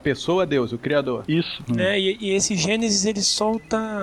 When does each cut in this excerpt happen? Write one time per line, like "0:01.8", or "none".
0:01.7

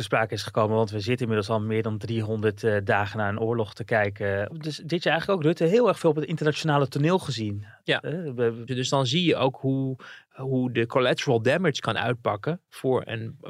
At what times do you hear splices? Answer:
0:04.5
0:08.7

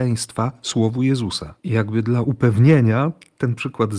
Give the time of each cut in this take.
0:01.6

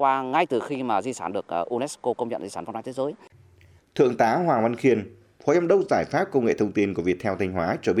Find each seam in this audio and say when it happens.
0:03.8

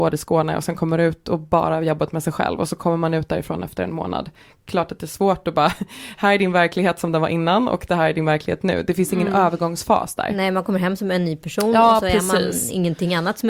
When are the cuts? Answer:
none

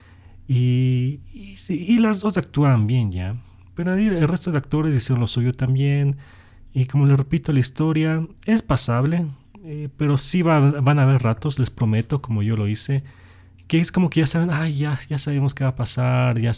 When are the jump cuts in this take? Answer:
none

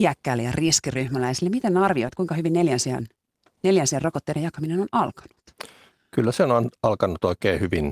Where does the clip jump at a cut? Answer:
none

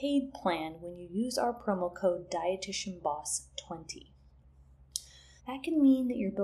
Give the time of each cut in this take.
0:05.4

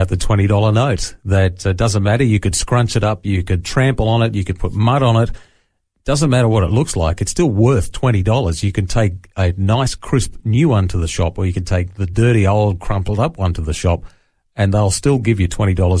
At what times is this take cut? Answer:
none

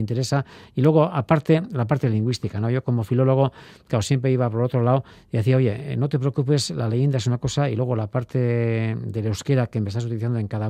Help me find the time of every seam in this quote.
none

